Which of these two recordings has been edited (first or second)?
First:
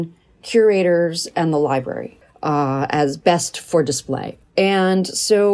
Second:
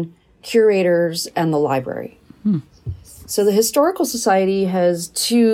first